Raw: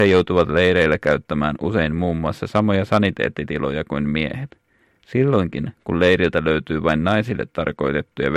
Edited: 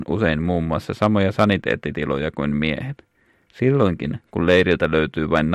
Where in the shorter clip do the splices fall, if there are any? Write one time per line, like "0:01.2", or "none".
none